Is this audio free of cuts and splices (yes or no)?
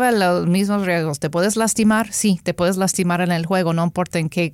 yes